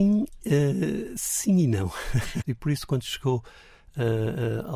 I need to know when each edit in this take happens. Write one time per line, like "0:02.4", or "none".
0:02.4

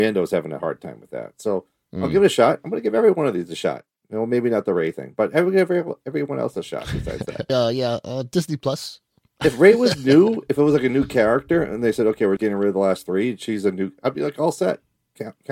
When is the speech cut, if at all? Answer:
0:07.5
0:12.4

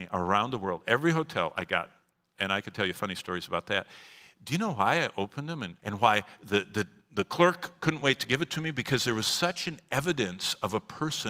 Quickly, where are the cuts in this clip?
0:05.8

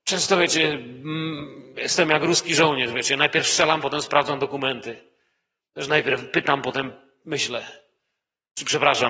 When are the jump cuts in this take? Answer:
none

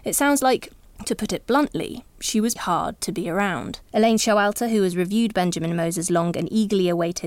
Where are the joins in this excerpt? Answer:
0:02.6
0:03.8

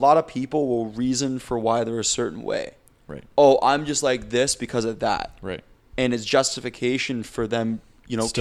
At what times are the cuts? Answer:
none

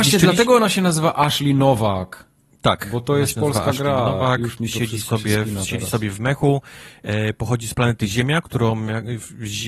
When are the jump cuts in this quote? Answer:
none

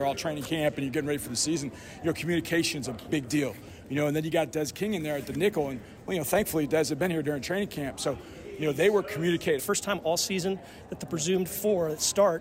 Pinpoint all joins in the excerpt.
0:03.1
0:09.6

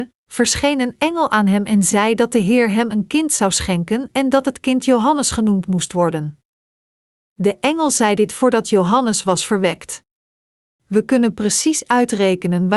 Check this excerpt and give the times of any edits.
0:10.8

